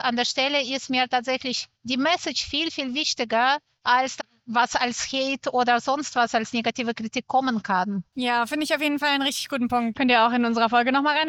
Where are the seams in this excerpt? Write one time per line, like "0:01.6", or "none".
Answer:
0:01.7
0:09.9

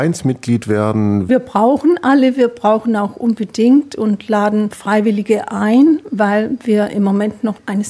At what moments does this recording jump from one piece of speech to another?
0:01.3

